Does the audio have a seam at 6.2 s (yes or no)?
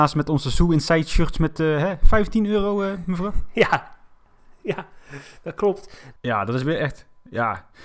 yes